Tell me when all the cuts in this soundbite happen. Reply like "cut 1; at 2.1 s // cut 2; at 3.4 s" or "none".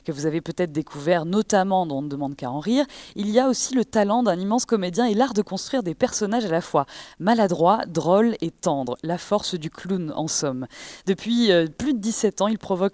none